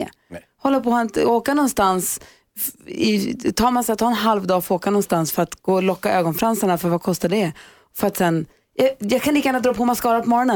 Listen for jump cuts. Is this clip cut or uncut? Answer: uncut